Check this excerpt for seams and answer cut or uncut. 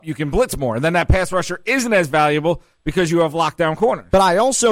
uncut